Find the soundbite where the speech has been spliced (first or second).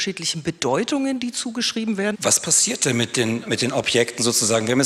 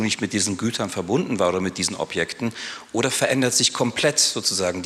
first